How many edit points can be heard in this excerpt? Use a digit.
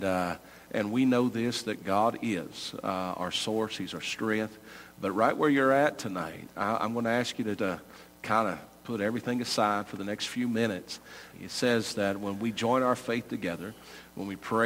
2